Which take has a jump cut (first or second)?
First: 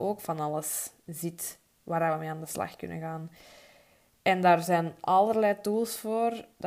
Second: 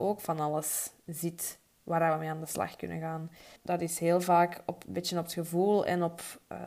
second